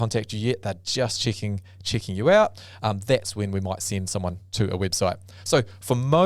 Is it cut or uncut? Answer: uncut